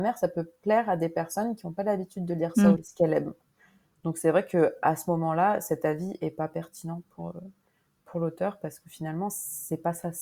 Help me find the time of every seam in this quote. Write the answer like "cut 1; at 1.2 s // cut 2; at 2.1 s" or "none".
cut 1; at 2.8 s